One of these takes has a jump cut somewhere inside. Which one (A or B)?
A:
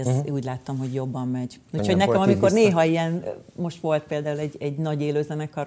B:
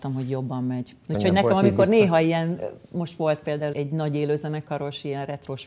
B